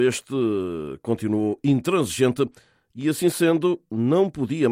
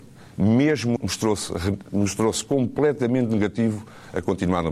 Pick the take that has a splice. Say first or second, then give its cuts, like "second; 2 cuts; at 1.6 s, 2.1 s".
second; 1 cut; at 1.0 s